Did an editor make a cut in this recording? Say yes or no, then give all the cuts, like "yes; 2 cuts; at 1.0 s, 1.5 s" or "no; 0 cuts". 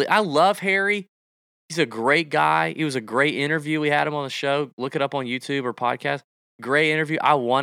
no; 0 cuts